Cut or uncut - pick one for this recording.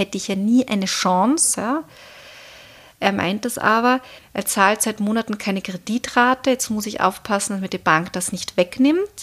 cut